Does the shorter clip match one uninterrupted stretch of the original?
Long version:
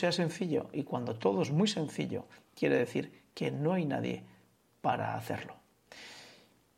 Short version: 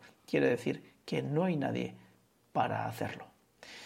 yes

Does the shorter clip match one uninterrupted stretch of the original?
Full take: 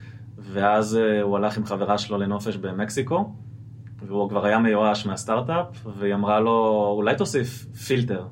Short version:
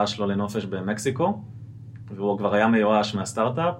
yes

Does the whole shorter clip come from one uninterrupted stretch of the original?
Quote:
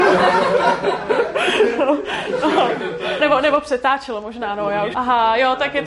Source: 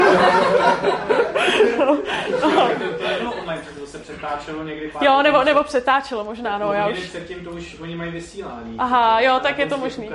no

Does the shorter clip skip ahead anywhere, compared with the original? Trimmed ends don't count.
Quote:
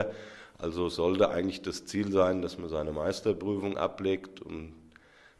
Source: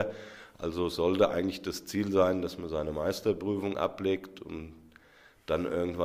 no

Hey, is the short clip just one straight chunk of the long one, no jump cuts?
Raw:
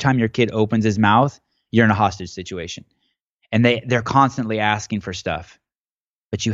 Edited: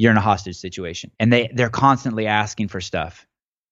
no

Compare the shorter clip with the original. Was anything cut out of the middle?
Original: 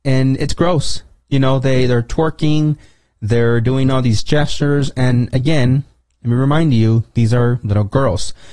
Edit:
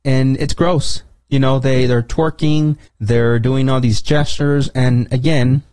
yes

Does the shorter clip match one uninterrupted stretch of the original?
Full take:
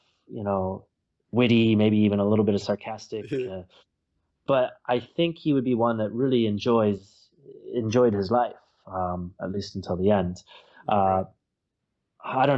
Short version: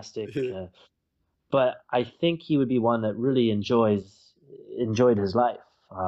yes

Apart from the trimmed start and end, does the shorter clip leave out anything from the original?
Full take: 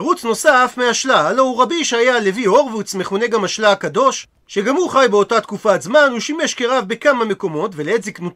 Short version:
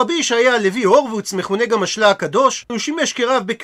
yes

